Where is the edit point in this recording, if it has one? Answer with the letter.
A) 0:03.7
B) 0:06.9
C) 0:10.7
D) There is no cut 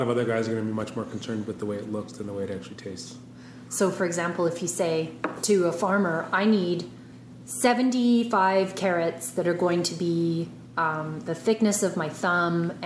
A